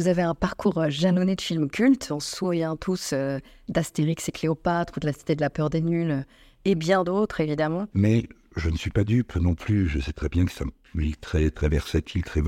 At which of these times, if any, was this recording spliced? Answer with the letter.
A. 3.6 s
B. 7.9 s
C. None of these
B